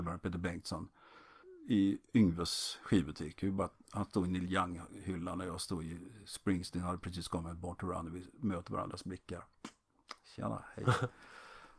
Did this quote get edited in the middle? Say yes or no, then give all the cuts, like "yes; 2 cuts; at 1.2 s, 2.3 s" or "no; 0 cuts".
no; 0 cuts